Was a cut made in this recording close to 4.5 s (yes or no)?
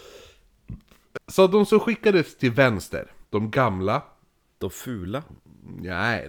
no